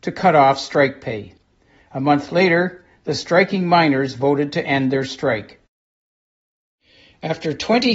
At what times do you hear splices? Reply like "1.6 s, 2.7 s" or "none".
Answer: none

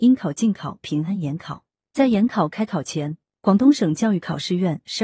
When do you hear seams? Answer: none

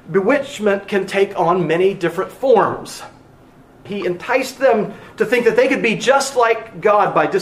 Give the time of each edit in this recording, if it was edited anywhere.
3.9 s

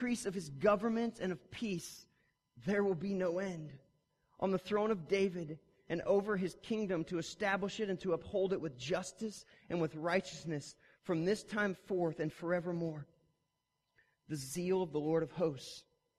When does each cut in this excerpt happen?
none

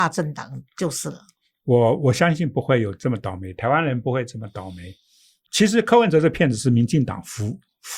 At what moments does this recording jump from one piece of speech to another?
none

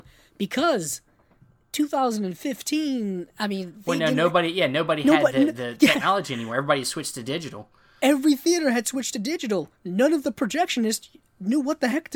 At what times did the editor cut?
none

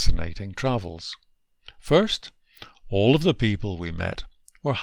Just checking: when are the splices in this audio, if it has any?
none

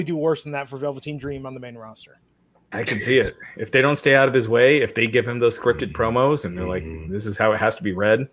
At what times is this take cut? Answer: none

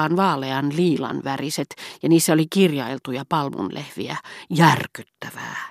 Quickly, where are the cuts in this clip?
none

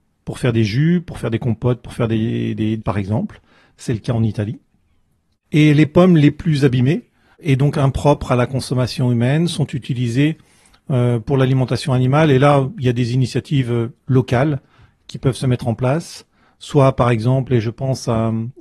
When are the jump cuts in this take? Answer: 2.8 s

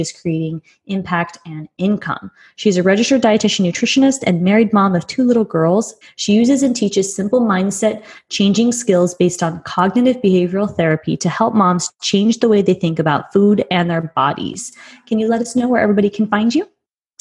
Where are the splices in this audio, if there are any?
6.0 s

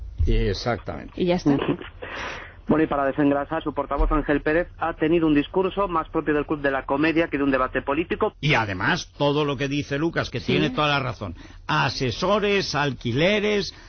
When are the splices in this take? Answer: 3.6 s, 8.3 s

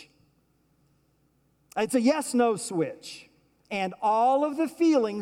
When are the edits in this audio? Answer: 3.6 s

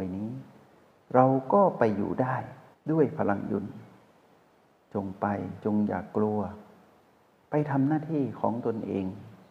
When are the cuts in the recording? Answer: none

